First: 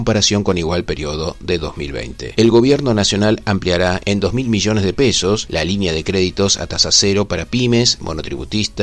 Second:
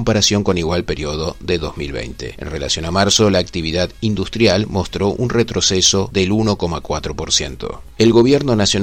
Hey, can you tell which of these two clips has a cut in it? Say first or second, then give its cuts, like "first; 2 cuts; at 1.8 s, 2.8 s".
first; 1 cut; at 2.3 s